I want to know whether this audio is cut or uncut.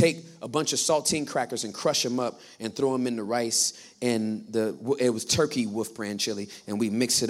uncut